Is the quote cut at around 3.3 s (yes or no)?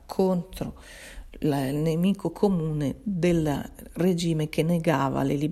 no